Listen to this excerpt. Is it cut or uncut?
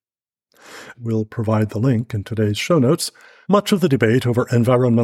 cut